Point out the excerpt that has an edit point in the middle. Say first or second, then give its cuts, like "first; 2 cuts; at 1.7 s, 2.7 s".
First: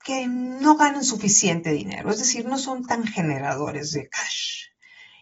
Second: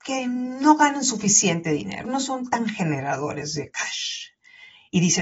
second; 1 cut; at 2.0 s